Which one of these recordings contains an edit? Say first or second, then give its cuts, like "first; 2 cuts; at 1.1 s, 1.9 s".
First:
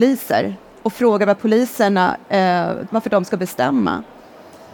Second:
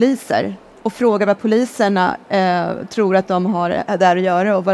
first; 1 cut; at 2.9 s